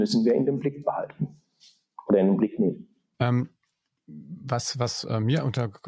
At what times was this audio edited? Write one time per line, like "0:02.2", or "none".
0:03.1